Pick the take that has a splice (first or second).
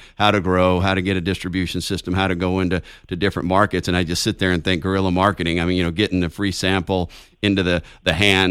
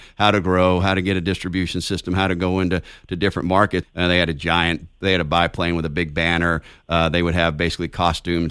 second